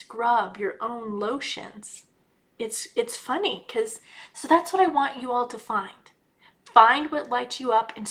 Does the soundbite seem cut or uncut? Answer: cut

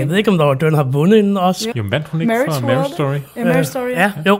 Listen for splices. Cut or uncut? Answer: cut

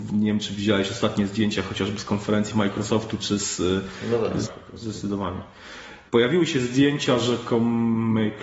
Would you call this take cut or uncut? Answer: cut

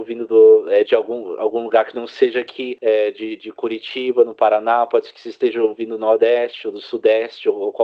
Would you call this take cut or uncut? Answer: uncut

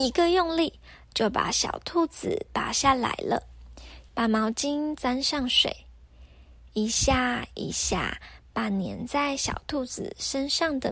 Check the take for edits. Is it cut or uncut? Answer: cut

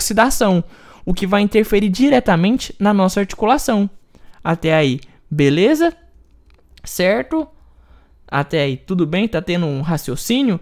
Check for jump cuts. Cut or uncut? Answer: uncut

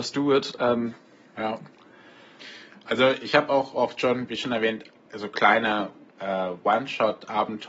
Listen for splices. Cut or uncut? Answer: uncut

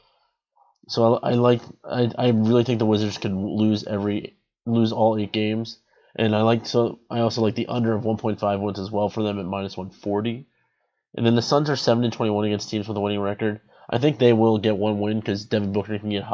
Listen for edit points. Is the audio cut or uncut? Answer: uncut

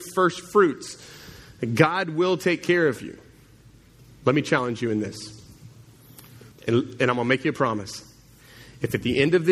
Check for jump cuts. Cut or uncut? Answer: cut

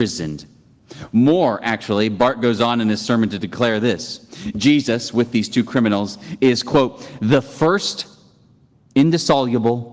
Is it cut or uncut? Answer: uncut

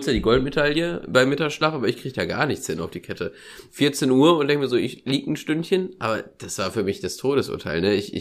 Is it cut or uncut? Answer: cut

